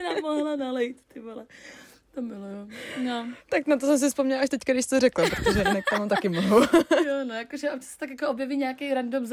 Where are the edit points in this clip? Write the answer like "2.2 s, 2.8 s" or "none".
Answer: none